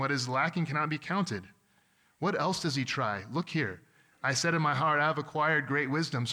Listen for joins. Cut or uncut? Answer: uncut